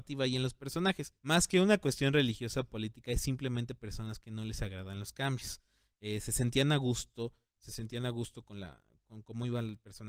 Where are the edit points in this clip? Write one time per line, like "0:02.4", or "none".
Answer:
0:01.2